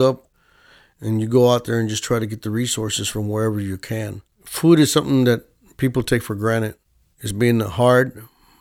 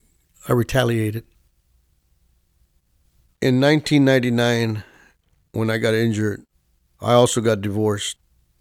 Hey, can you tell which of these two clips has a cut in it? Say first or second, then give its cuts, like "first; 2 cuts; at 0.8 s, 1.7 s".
first; 2 cuts; at 4.3 s, 7.0 s